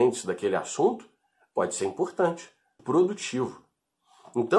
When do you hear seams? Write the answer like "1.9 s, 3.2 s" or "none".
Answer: 2.8 s